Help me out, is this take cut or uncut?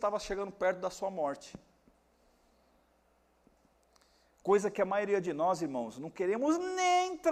uncut